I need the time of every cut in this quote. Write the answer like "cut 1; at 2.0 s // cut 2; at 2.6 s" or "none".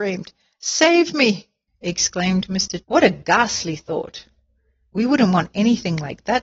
cut 1; at 1.7 s // cut 2; at 2.8 s